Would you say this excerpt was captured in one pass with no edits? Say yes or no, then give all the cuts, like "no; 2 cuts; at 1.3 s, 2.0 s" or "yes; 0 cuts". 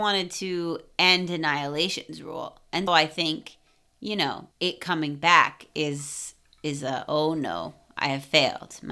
no; 2 cuts; at 2.9 s, 4.5 s